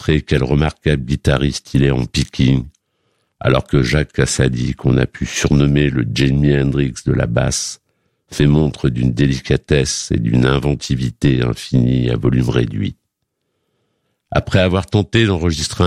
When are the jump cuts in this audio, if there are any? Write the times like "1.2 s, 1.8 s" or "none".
none